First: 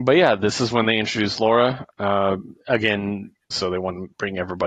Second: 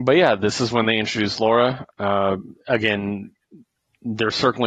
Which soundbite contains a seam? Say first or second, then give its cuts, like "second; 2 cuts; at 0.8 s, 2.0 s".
first; 1 cut; at 3.5 s